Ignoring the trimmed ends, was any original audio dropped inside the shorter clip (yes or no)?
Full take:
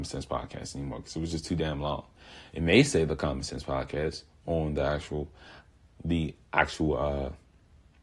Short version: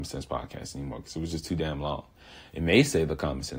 no